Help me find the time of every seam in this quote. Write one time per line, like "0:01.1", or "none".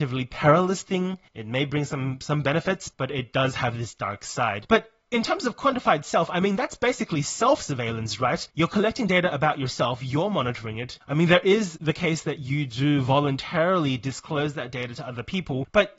0:01.3